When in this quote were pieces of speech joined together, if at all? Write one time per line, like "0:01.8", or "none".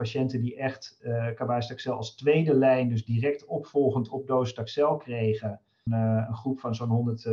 0:05.9